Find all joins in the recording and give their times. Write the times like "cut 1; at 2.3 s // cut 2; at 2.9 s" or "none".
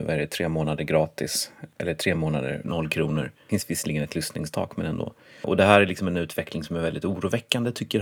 cut 1; at 2.6 s